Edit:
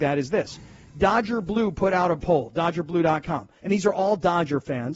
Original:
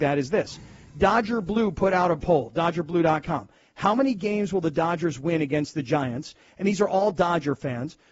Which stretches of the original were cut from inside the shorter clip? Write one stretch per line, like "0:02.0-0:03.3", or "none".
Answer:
0:03.6-0:06.5